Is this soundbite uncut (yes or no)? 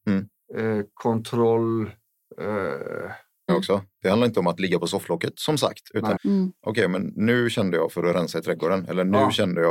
no